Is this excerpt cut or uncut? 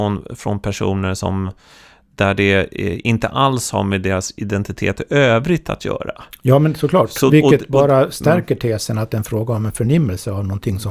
uncut